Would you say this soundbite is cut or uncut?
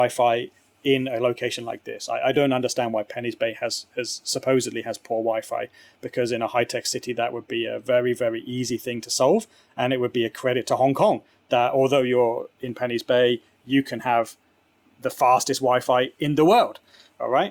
uncut